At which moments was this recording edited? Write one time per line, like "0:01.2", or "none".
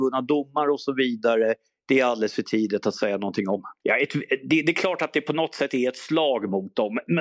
0:03.8